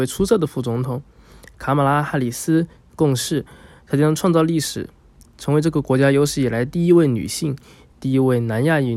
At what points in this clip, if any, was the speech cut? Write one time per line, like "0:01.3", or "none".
0:07.9

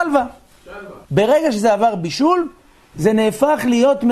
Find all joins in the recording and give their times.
0:01.0

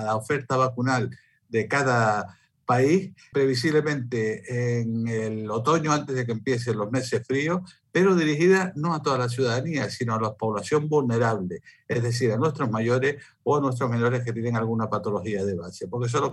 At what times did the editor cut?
0:03.3

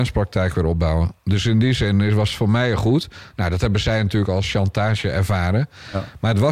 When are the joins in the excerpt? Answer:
none

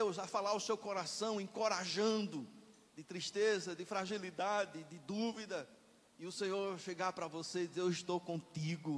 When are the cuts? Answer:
0:02.9

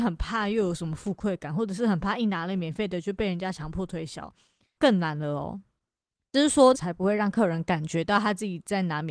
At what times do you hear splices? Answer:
0:04.8
0:06.7

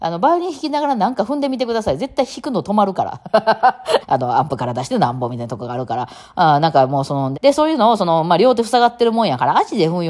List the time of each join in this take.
0:04.0
0:07.3

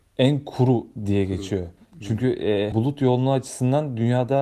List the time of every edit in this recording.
0:02.7

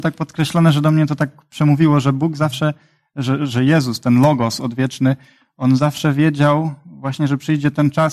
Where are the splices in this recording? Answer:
none

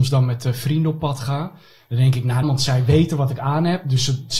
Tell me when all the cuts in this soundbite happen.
0:02.4

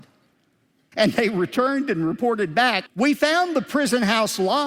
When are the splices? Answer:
0:00.9
0:02.9

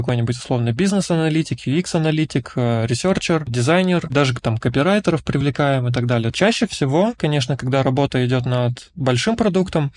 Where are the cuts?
0:04.1
0:06.3

